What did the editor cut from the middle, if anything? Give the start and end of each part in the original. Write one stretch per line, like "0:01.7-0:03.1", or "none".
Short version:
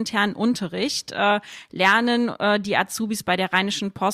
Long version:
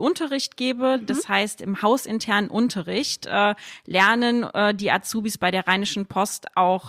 none